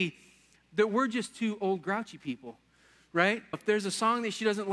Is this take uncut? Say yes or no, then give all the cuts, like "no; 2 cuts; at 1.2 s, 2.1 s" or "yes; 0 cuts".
no; 1 cut; at 3.5 s